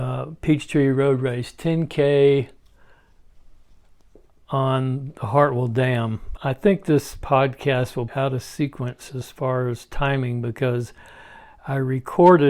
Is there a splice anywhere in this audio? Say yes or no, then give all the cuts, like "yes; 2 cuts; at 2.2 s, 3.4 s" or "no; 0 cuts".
yes; 2 cuts; at 6.4 s, 8.1 s